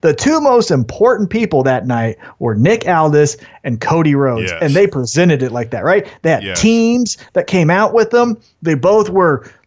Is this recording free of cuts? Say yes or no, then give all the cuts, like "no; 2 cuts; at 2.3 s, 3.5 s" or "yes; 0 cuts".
yes; 0 cuts